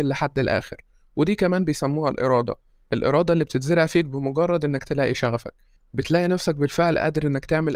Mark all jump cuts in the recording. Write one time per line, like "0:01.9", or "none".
none